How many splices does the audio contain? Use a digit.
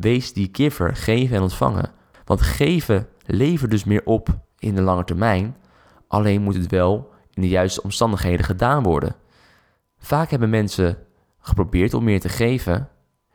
1